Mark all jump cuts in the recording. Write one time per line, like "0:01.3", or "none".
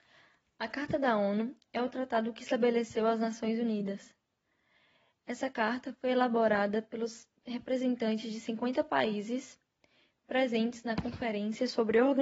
none